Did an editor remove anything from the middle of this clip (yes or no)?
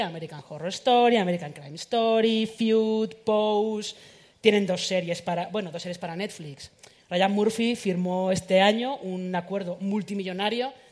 no